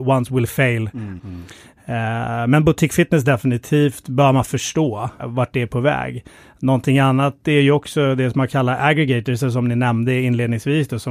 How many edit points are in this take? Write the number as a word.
two